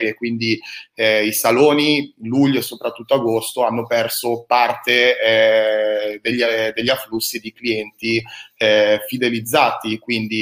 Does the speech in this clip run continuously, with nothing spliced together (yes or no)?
yes